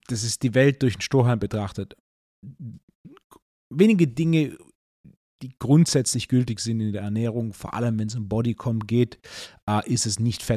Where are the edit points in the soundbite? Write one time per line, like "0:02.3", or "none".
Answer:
none

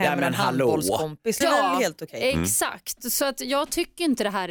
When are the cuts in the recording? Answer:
0:01.4

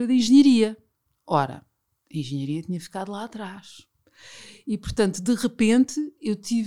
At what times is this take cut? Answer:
none

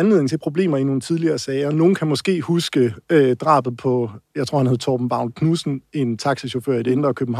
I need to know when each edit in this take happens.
none

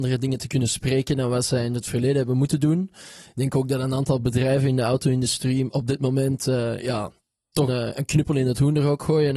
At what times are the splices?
0:07.7

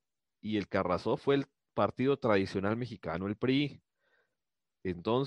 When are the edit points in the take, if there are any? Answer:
none

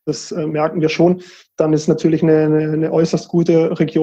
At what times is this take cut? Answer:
none

